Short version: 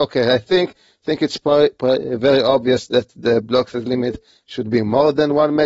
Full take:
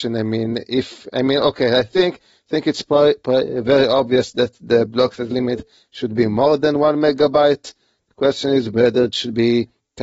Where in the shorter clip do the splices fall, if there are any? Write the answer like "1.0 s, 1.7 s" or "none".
none